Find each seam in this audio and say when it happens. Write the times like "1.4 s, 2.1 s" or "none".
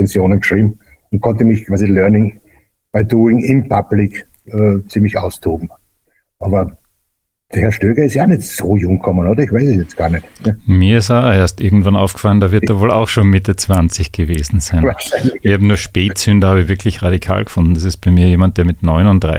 none